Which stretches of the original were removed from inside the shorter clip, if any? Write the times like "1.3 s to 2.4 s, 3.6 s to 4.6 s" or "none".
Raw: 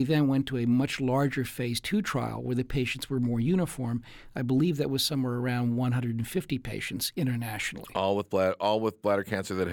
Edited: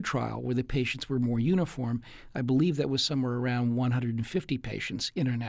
none